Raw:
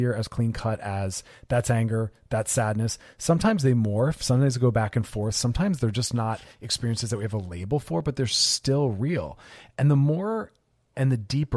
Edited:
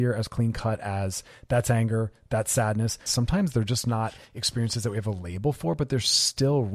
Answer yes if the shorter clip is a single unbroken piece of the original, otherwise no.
no